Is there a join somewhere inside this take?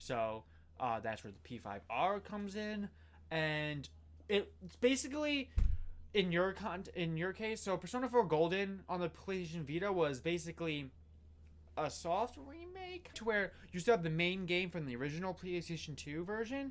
yes; 1 cut; at 13.1 s

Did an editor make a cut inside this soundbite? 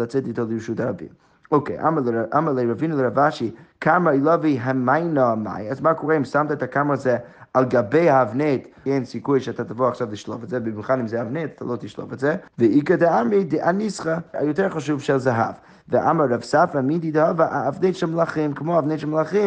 yes; 3 cuts; at 8.9 s, 12.5 s, 14.3 s

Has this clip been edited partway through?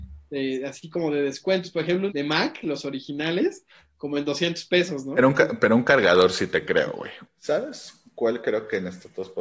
yes; 2 cuts; at 2.1 s, 7.2 s

